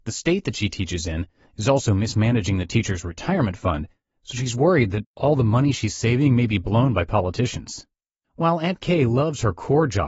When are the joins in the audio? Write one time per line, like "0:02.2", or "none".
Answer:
0:08.2